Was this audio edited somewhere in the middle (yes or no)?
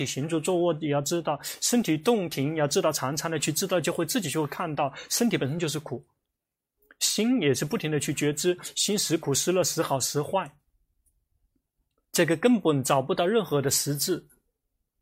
no